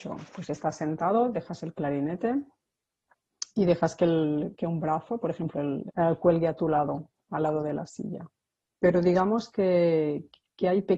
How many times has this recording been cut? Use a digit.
2